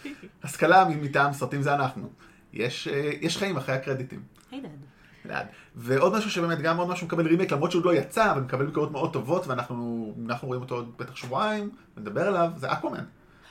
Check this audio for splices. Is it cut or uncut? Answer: uncut